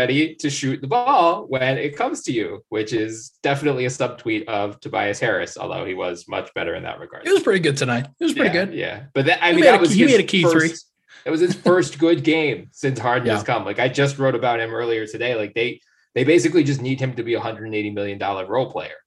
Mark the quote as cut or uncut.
uncut